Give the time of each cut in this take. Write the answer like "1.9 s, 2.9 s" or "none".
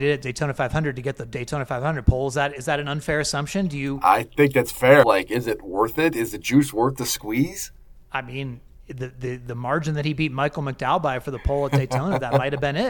5.0 s